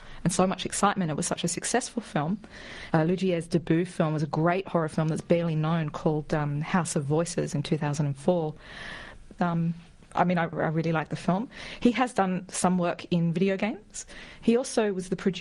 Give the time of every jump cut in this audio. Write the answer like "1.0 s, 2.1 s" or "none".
2.9 s, 9.4 s, 10.5 s